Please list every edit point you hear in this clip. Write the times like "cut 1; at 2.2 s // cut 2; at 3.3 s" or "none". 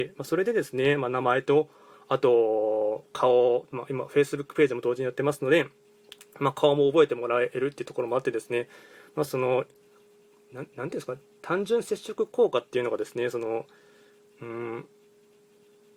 cut 1; at 9.3 s